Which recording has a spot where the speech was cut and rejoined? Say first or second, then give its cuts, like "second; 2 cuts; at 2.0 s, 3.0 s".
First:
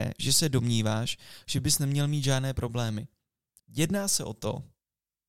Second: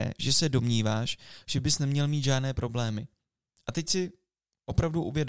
first; 1 cut; at 3.6 s